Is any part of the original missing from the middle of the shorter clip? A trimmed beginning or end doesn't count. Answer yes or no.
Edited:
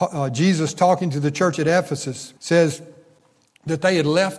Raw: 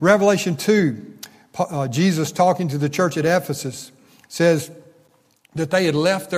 yes